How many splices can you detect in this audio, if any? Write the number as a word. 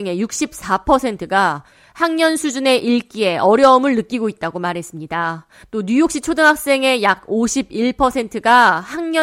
zero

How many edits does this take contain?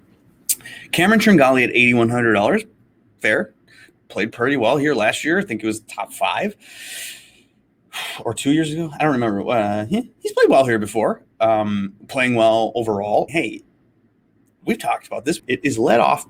two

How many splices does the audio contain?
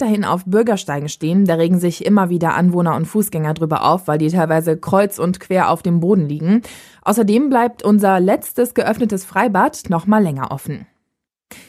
one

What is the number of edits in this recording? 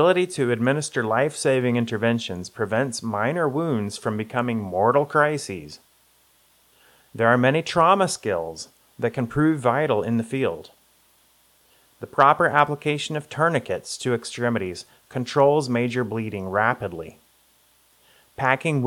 zero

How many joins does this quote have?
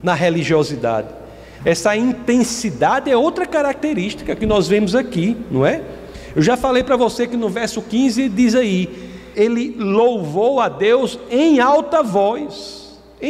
two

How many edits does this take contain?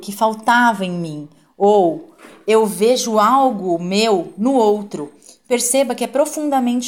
zero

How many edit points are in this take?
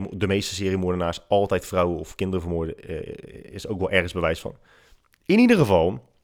zero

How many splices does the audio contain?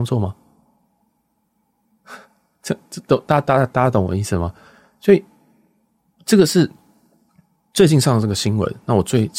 zero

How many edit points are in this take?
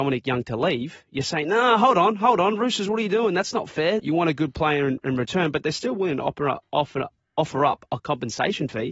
one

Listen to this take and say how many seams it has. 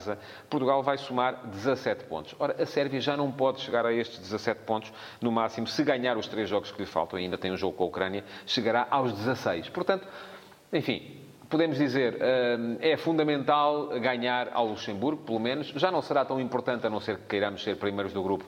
zero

